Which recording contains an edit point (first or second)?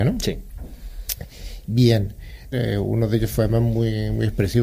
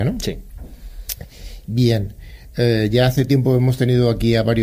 first